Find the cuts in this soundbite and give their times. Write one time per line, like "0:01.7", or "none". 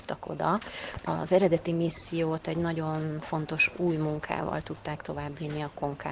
none